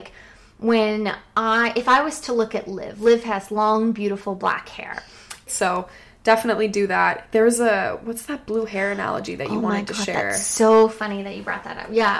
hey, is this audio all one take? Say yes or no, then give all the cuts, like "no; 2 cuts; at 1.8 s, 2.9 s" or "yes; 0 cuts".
no; 1 cut; at 5.5 s